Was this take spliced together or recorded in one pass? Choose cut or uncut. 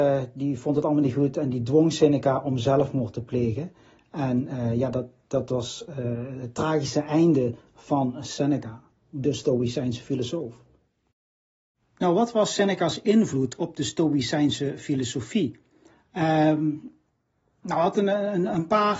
uncut